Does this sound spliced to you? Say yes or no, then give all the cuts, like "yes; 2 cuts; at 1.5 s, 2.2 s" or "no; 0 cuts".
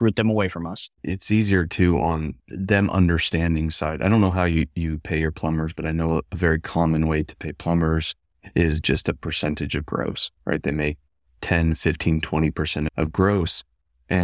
yes; 1 cut; at 2.4 s